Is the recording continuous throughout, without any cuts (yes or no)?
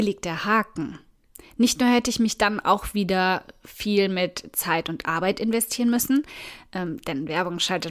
yes